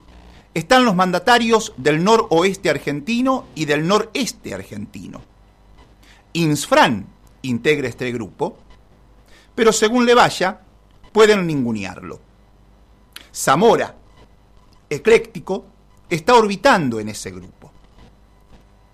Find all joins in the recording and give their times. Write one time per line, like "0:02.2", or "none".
0:13.3